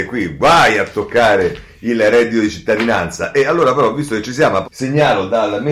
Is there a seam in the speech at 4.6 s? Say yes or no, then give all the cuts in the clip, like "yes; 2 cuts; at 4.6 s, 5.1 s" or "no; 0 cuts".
yes; 1 cut; at 4.6 s